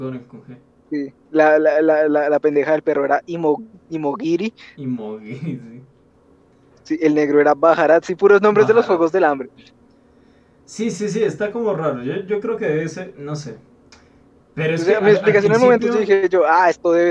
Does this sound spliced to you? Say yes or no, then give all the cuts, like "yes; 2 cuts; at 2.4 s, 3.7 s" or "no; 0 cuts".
no; 0 cuts